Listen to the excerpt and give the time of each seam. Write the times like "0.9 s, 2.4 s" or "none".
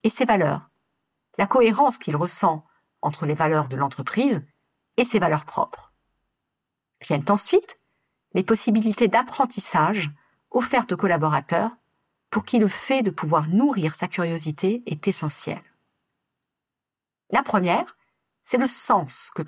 17.2 s

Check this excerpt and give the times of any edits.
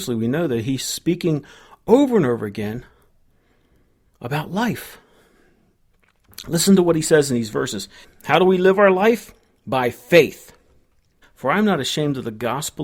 8.0 s, 11.2 s

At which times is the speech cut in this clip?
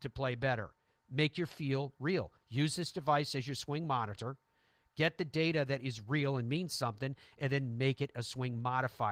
none

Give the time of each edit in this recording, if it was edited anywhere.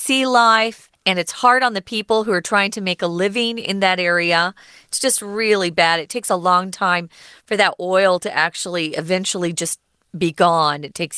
none

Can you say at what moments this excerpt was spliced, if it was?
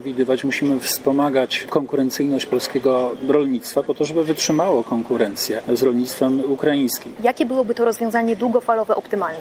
7.2 s

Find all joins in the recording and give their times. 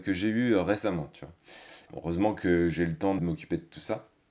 1.9 s, 3.2 s

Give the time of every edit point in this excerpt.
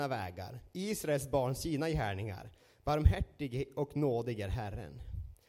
none

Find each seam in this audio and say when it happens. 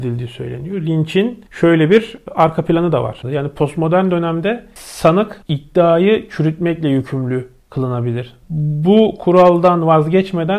3.2 s, 8.4 s

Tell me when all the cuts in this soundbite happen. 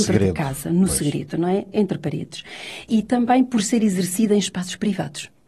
none

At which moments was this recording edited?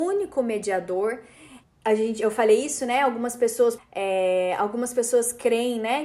1.6 s, 3.8 s

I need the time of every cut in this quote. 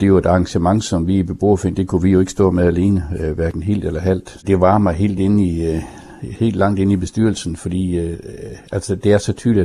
4.4 s

